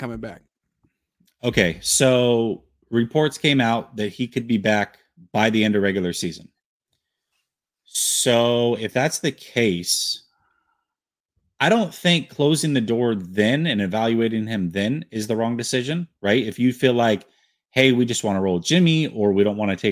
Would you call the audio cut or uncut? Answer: uncut